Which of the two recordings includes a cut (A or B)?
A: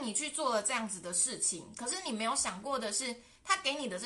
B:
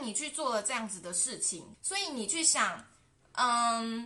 B